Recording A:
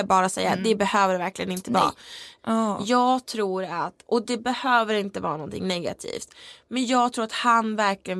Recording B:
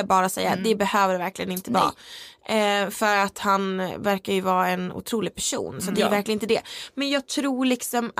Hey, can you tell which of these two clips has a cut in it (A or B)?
A